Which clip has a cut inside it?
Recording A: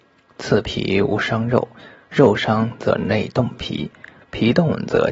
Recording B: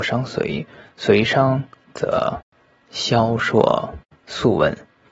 B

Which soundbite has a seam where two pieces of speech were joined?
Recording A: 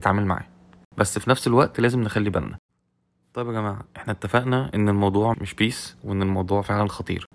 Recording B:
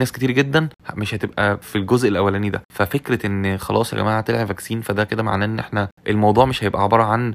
A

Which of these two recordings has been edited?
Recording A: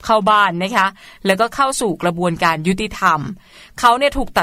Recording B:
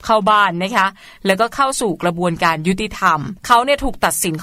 B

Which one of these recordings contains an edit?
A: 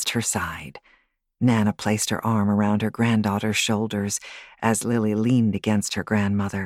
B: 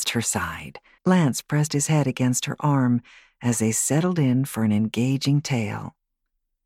B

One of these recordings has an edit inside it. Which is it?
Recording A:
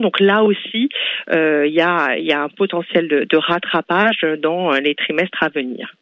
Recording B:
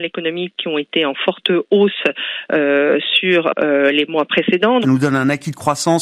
B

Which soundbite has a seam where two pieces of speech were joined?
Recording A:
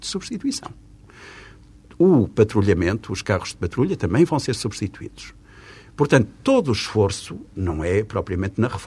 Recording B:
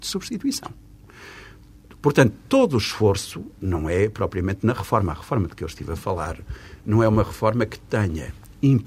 B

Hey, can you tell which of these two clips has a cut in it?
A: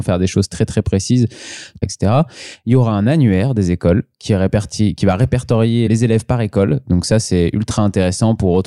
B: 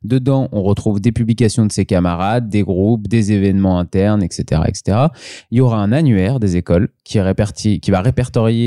A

